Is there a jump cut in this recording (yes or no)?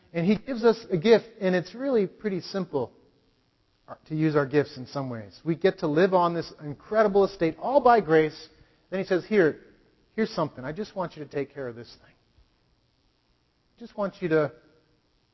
no